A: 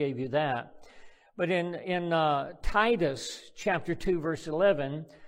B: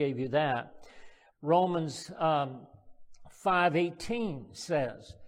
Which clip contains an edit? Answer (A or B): B